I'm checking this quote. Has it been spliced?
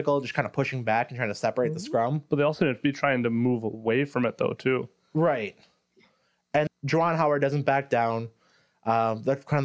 yes; 1 cut; at 6.7 s

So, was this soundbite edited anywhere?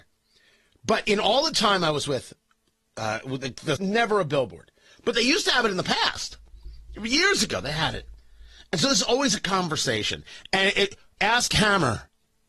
yes; 2 cuts; at 3.8 s, 11.2 s

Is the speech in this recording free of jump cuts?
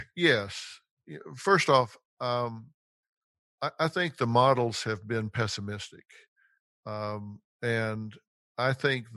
yes; 0 cuts

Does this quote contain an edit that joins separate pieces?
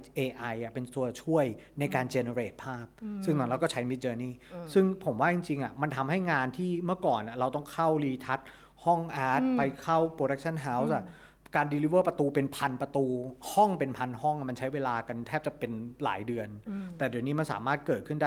no; 0 cuts

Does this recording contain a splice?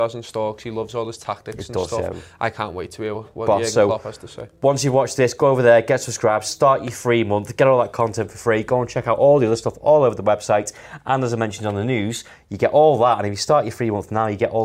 no; 0 cuts

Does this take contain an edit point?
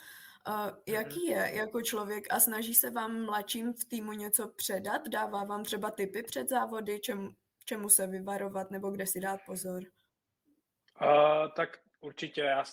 no; 0 cuts

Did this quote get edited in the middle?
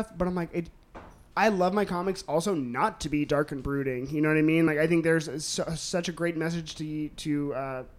no; 0 cuts

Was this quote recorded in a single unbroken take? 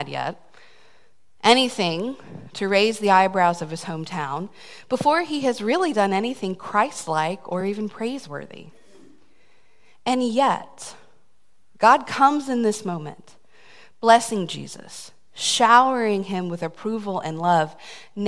yes; 0 cuts

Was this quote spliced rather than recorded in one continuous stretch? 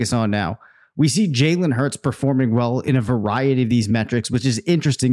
no; 0 cuts

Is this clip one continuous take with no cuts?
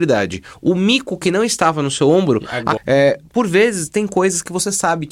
no; 1 cut; at 2.8 s

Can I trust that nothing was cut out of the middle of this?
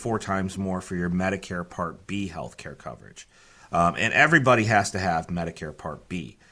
yes; 0 cuts

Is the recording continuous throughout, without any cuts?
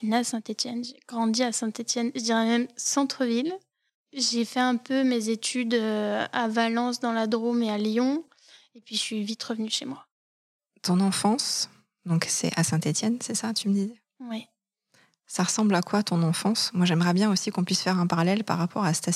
yes; 0 cuts

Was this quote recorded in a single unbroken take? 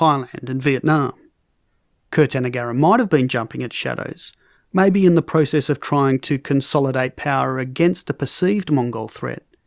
yes; 0 cuts

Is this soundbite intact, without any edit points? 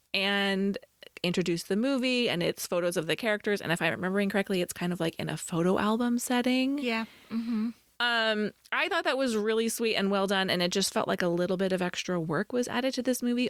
yes; 0 cuts

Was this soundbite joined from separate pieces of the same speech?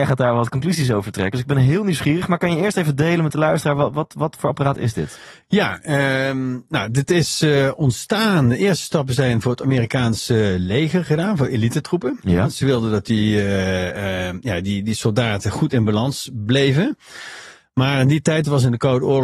no; 0 cuts

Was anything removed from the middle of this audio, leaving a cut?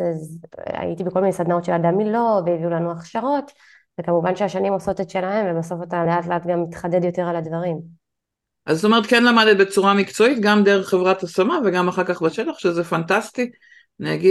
no; 0 cuts

